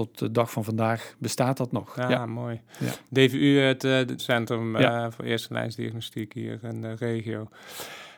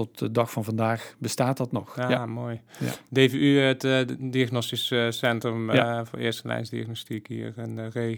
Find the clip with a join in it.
first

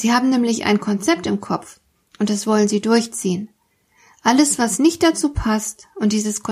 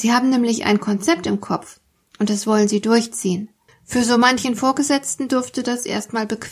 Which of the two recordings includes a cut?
second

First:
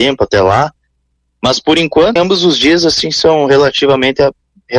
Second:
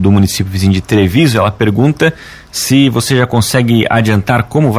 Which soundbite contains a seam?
first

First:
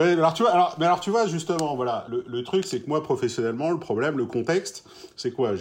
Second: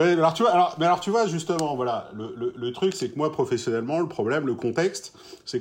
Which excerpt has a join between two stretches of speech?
first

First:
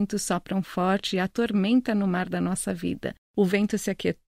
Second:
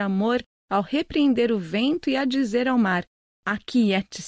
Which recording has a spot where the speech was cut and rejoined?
first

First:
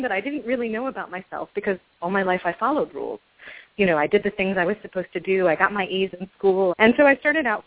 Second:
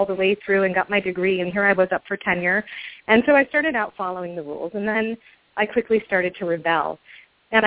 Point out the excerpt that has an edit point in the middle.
first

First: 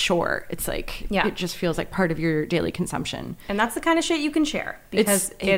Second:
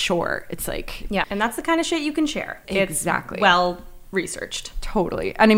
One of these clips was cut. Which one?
second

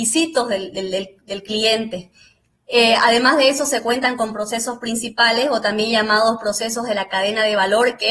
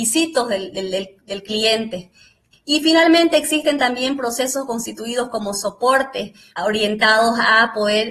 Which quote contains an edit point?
second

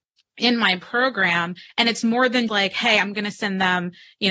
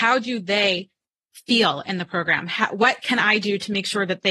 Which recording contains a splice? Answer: first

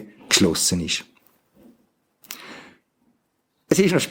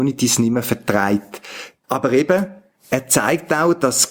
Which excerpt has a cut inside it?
second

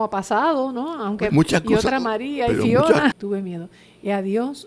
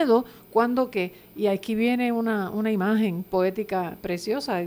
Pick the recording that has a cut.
first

